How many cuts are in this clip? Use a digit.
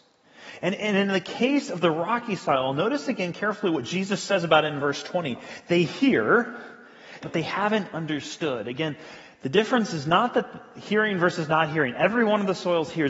1